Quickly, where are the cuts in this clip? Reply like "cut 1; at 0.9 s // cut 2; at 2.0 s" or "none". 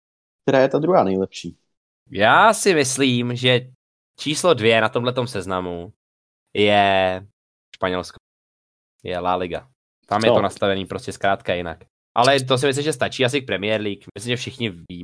cut 1; at 10.0 s